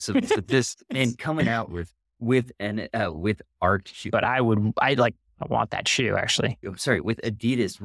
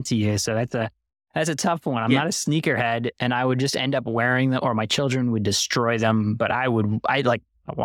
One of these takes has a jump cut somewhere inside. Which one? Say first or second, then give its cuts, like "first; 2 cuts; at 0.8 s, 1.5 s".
first; 2 cuts; at 4.1 s, 6.6 s